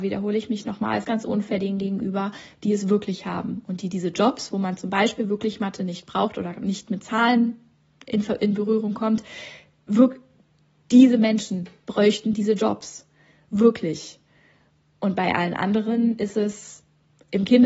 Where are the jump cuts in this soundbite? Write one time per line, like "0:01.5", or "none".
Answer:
0:01.0